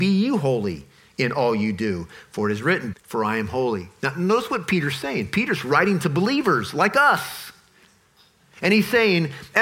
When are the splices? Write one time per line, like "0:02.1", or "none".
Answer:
0:02.9